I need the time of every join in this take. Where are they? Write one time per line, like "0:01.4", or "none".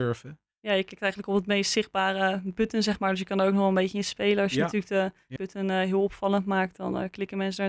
0:05.4